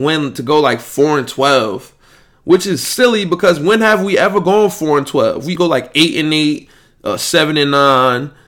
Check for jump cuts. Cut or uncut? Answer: cut